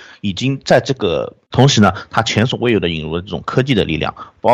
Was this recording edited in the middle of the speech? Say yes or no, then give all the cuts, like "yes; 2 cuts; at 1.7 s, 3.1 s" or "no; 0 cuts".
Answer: yes; 1 cut; at 1.5 s